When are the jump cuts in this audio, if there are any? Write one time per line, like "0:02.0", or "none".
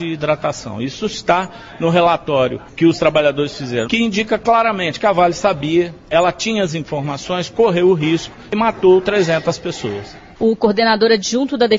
0:03.8